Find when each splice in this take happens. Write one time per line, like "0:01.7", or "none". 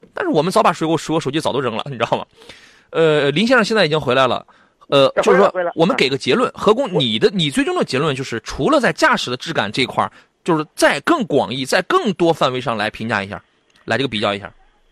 none